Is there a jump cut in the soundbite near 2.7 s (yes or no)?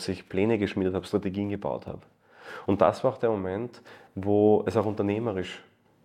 no